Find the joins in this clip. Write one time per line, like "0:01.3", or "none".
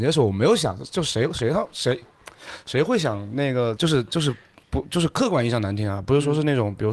0:03.8